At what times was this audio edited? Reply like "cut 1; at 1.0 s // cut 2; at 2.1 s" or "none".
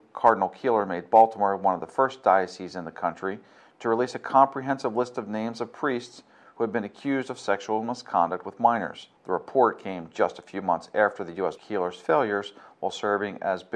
cut 1; at 11.6 s